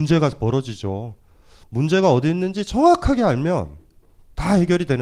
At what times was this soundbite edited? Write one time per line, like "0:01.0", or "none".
none